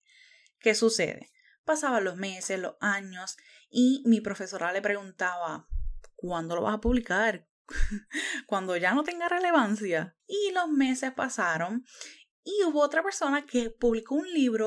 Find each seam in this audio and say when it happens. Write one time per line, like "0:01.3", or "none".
0:10.2